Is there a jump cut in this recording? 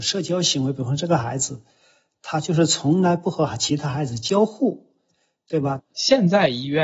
yes; 1 cut; at 5.8 s

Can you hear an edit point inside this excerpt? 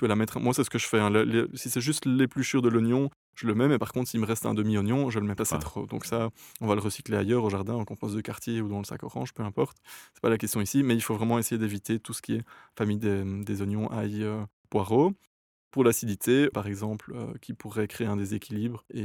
yes; 2 cuts; at 5.4 s, 16.5 s

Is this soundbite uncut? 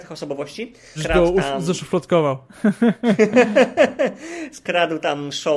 no; 1 cut; at 1.0 s

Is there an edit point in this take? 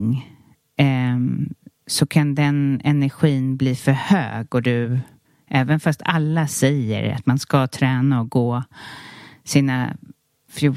no; 0 cuts

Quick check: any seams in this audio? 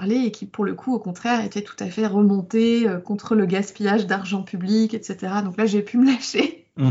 no; 0 cuts

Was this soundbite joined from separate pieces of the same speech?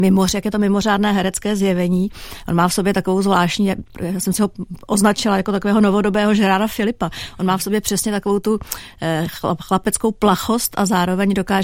no; 0 cuts

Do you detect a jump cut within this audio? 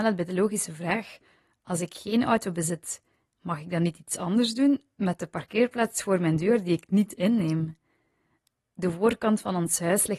no; 0 cuts

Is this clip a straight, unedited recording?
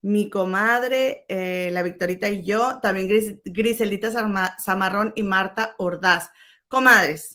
yes; 0 cuts

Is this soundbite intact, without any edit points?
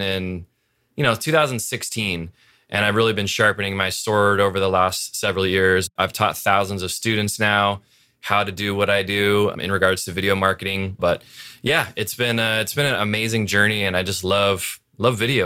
no; 1 cut; at 11.0 s

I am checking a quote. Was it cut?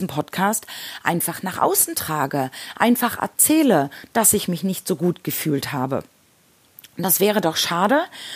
no; 0 cuts

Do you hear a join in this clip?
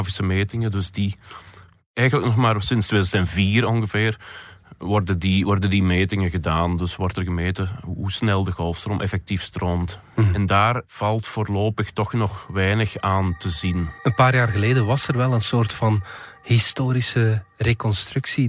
no; 0 cuts

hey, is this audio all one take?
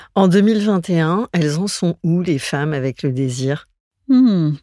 yes; 0 cuts

